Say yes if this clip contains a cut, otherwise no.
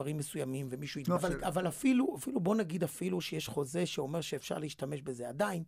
yes